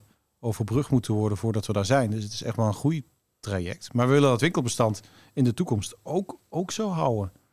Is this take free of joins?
yes; 0 cuts

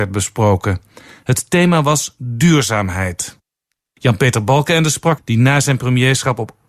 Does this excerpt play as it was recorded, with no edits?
no; 1 cut; at 5.2 s

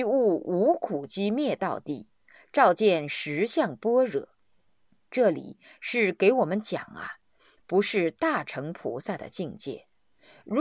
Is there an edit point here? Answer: yes; 1 cut; at 7.6 s

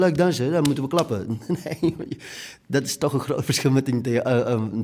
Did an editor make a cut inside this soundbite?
no; 0 cuts

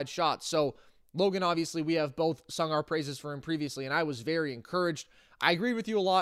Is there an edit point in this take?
no; 0 cuts

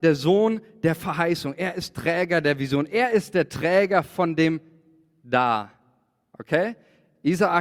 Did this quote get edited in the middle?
no; 0 cuts

